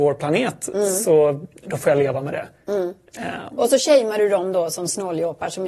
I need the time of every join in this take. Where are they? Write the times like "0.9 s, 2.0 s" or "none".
none